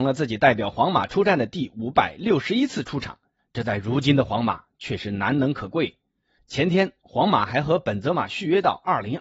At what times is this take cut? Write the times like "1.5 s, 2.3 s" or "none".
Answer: 3.4 s